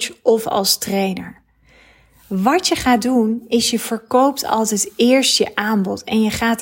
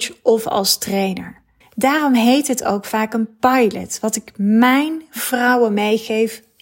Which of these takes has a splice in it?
second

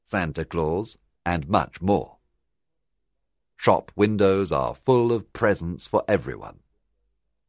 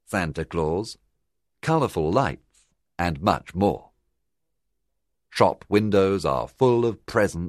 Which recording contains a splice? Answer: first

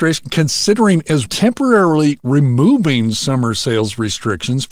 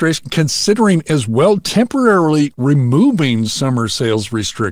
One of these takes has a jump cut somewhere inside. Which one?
first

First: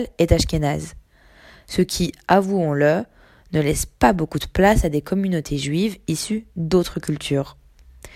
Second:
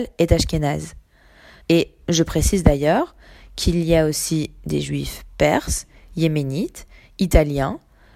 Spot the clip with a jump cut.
second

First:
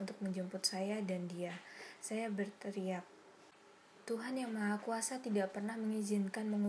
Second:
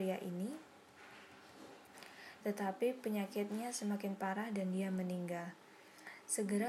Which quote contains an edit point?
second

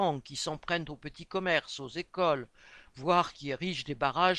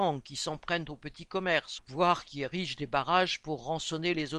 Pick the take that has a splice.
second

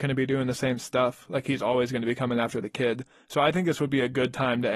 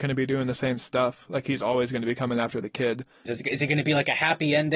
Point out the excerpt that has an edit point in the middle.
second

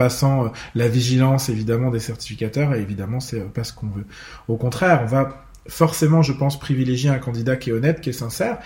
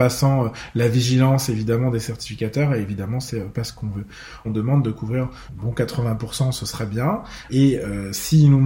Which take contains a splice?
second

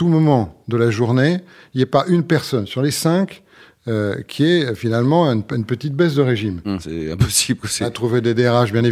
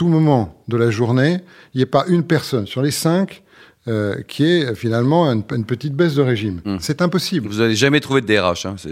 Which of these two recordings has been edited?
first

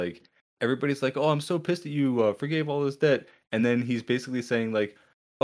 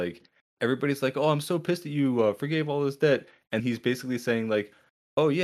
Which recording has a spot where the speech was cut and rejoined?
second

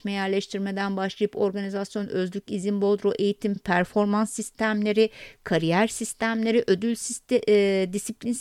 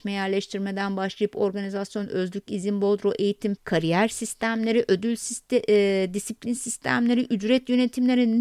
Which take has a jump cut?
second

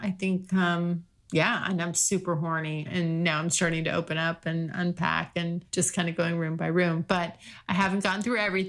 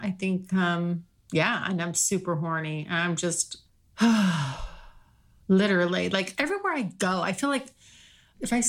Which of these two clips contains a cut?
first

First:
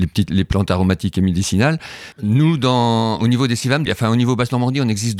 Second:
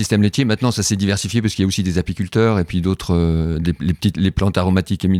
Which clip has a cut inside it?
first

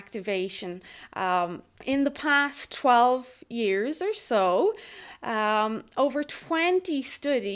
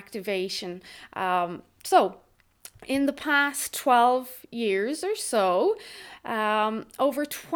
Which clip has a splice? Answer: first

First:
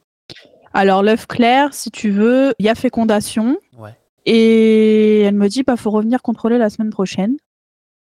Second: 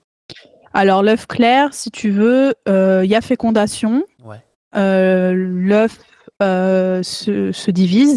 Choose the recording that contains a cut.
first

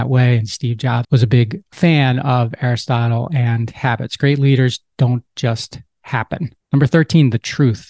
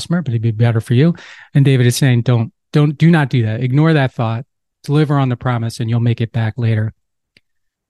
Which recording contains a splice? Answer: first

